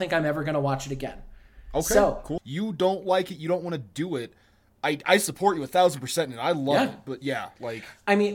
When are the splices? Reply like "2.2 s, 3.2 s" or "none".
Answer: 2.4 s